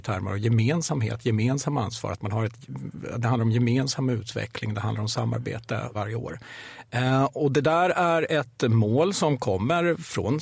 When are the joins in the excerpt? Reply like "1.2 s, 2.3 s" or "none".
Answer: 5.9 s

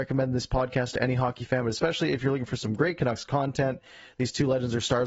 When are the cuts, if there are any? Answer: none

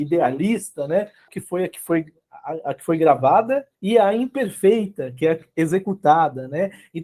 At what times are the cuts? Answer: 1.3 s, 3.7 s

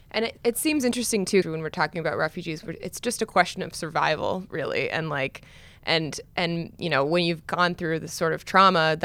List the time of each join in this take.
1.4 s

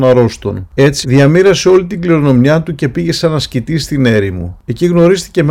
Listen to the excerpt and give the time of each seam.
1.0 s

